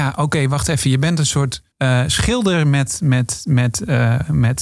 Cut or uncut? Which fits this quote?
cut